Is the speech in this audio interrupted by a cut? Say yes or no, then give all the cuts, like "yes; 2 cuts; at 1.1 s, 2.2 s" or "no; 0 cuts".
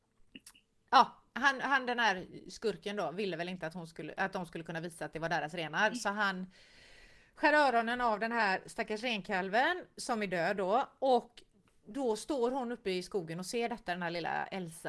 no; 0 cuts